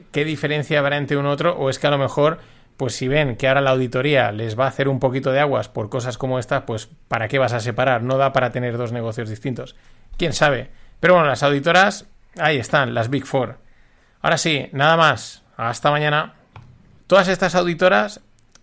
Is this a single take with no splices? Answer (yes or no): no